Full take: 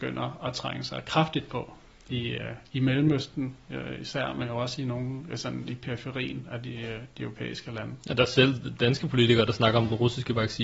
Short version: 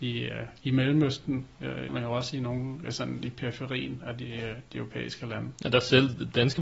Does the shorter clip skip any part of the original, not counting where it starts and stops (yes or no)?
yes